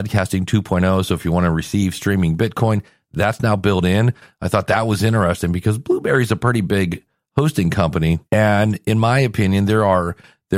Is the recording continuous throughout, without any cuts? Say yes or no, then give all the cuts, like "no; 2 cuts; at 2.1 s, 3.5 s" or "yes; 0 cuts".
no; 1 cut; at 8.3 s